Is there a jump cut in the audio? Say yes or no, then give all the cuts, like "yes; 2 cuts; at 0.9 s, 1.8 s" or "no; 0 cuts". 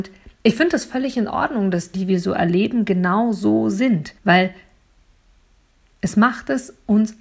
yes; 2 cuts; at 1.9 s, 4.2 s